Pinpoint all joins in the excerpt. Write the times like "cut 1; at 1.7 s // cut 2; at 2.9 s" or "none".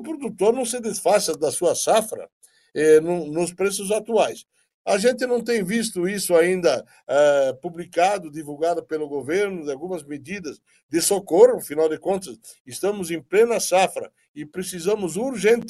cut 1; at 4.7 s

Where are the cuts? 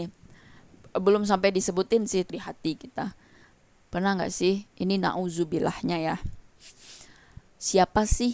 cut 1; at 2.3 s

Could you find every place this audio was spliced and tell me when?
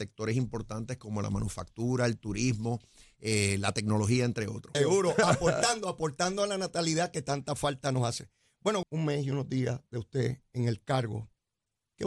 cut 1; at 4.7 s // cut 2; at 8.8 s

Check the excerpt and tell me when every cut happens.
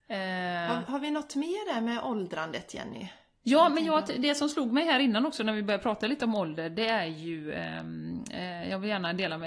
none

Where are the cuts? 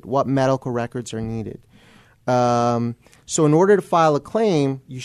none

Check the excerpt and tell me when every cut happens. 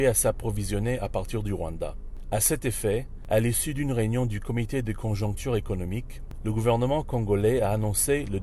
none

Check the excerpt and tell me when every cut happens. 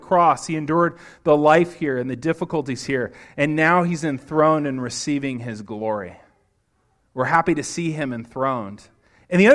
cut 1; at 7.0 s

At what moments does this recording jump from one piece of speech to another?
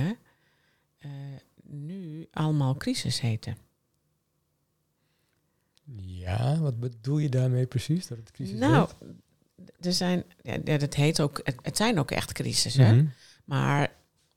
none

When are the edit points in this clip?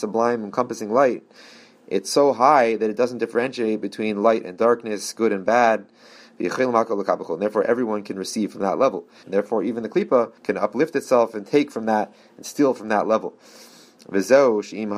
cut 1; at 9.2 s // cut 2; at 10.4 s

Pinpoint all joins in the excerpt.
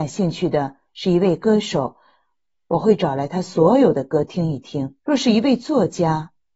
cut 1; at 5.0 s

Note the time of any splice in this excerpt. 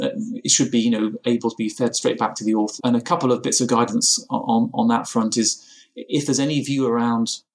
cut 1; at 2.8 s

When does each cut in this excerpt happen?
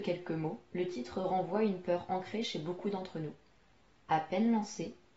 none

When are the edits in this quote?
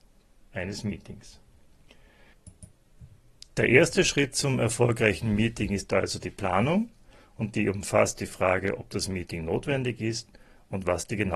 none

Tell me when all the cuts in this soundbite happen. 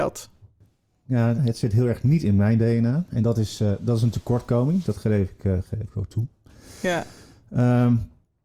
cut 1; at 1.4 s

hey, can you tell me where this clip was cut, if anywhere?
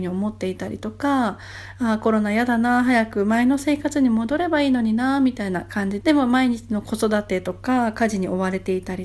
cut 1; at 6.0 s

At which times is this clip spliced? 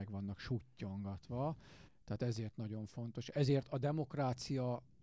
cut 1; at 1.9 s

